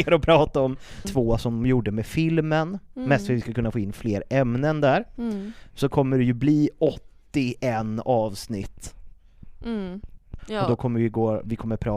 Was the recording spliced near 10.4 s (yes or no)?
yes